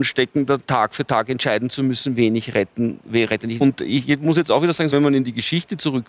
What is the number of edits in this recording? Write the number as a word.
two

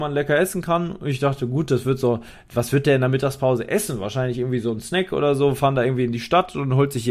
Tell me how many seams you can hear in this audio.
zero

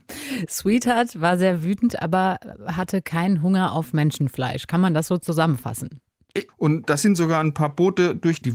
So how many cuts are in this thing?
one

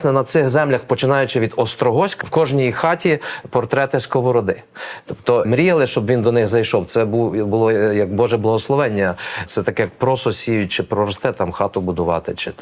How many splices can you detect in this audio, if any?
three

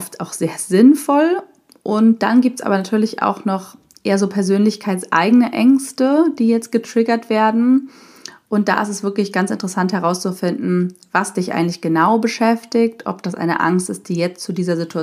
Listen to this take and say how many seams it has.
zero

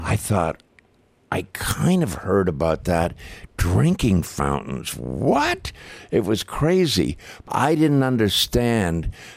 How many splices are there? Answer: one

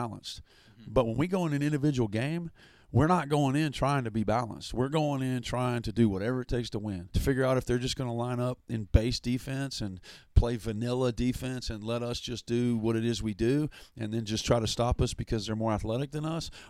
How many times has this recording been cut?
one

